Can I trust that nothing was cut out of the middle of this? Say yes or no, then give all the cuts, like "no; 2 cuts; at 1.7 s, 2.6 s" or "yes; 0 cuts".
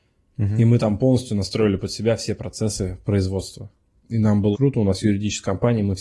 no; 1 cut; at 4.5 s